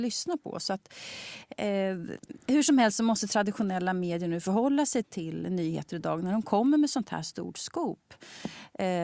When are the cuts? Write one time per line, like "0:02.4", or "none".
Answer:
0:05.0